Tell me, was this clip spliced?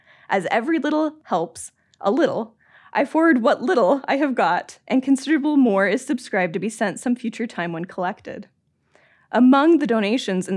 no; 0 cuts

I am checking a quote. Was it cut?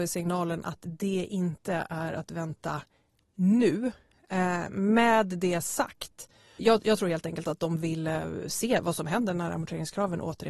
yes; 1 cut; at 6.6 s

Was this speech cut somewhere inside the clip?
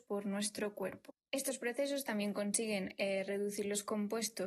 no; 0 cuts

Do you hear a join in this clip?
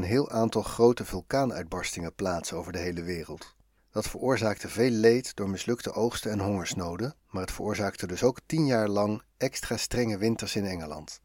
yes; 2 cuts; at 3.8 s, 7.2 s

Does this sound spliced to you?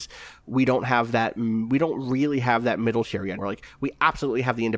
yes; 1 cut; at 3.4 s

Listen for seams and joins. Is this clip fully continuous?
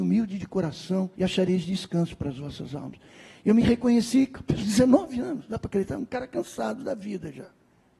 no; 1 cut; at 1.1 s

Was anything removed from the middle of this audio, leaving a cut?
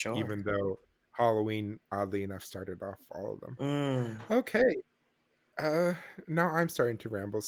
no; 0 cuts

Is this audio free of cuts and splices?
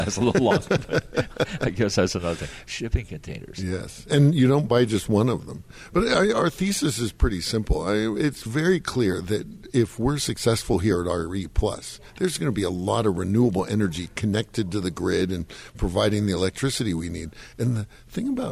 yes; 0 cuts

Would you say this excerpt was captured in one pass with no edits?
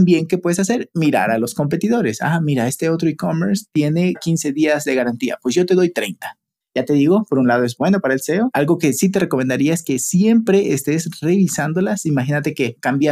no; 2 cuts; at 6.6 s, 8.5 s

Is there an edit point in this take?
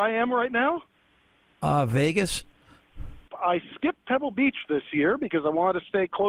yes; 1 cut; at 3.3 s

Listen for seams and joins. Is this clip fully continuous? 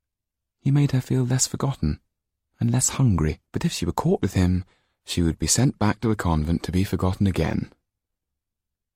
no; 1 cut; at 3.5 s

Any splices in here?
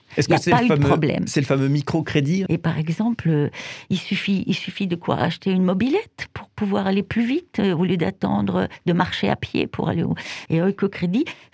yes; 2 cuts; at 2.5 s, 10.5 s

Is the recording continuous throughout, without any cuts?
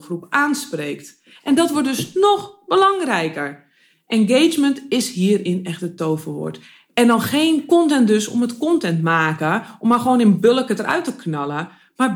yes; 0 cuts

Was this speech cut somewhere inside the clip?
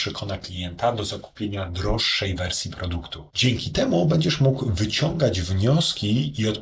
yes; 1 cut; at 3.3 s

